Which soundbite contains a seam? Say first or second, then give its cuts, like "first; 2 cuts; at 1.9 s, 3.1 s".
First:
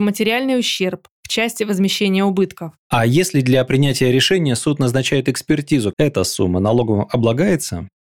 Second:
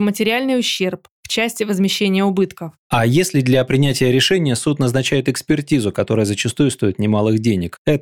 first; 1 cut; at 5.9 s